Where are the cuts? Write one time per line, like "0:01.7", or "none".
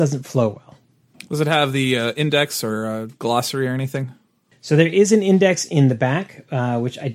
none